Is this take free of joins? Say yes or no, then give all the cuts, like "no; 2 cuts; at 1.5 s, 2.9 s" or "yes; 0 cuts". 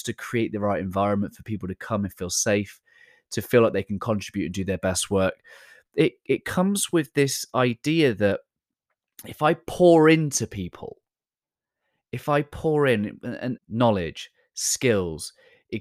no; 1 cut; at 13.6 s